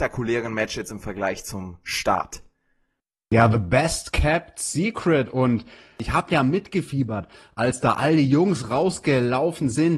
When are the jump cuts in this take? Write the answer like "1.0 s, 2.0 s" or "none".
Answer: none